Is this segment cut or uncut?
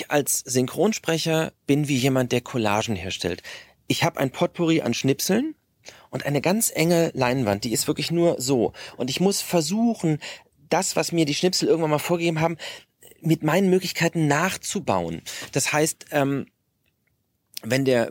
uncut